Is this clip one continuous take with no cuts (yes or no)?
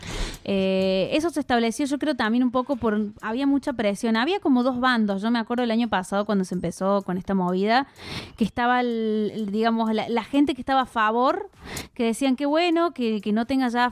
yes